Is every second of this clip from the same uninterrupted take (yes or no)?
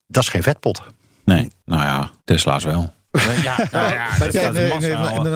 no